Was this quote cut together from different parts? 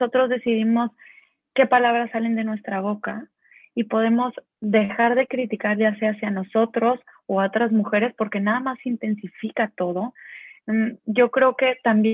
no; 0 cuts

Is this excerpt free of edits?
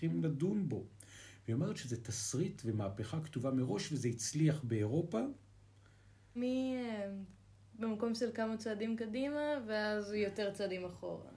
no; 1 cut; at 6.4 s

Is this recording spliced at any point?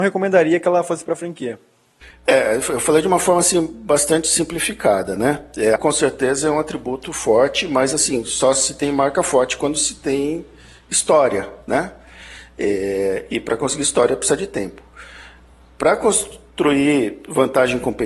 yes; 1 cut; at 5.8 s

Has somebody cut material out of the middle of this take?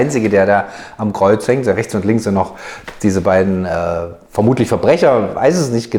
no; 0 cuts

